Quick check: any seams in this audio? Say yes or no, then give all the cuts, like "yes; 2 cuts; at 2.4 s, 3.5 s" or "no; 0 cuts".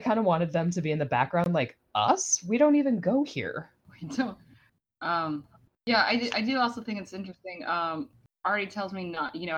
no; 0 cuts